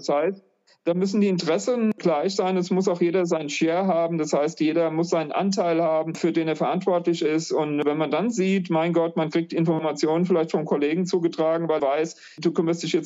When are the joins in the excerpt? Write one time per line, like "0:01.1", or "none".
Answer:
0:11.8